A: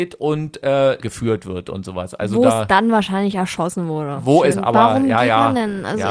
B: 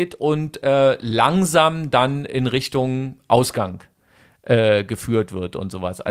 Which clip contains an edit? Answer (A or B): A